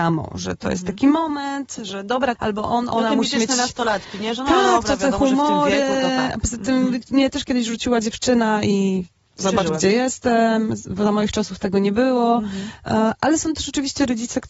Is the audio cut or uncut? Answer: cut